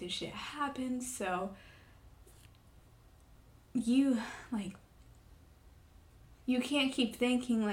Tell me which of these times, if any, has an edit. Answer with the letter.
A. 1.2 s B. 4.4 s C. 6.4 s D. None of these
C